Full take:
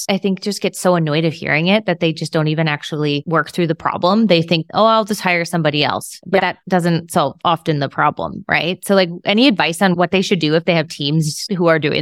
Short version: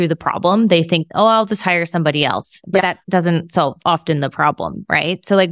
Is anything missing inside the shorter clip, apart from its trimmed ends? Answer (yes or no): no